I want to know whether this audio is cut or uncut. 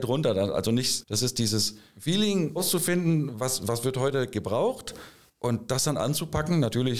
cut